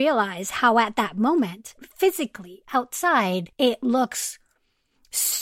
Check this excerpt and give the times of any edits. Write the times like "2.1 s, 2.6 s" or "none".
1.8 s, 3.5 s